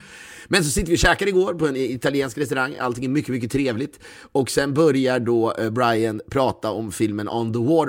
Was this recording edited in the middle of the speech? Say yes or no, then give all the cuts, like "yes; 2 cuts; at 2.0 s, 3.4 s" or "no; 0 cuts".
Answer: no; 0 cuts